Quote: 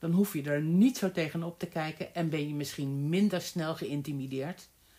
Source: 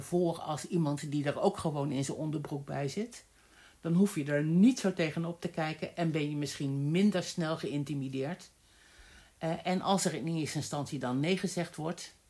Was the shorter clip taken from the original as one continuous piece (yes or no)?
yes